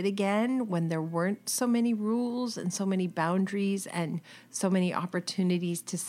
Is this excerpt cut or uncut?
uncut